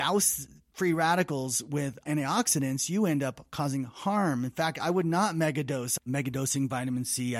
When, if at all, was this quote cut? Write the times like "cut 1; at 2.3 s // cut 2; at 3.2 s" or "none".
cut 1; at 6.0 s